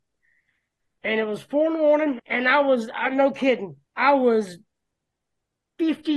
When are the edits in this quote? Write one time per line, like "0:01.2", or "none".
0:02.2
0:03.9